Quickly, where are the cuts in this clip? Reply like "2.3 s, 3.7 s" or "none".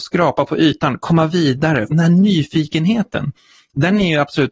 1.9 s

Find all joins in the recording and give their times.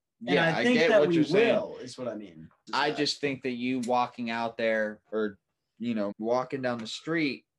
2.7 s, 5.0 s, 6.1 s

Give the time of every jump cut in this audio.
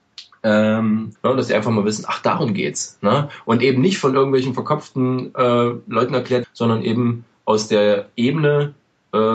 1.1 s, 6.4 s

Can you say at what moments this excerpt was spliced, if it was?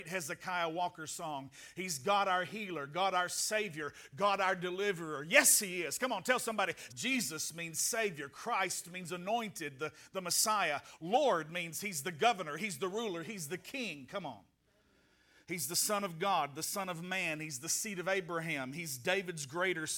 6.9 s

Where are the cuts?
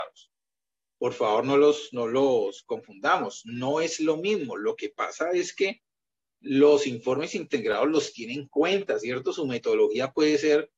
none

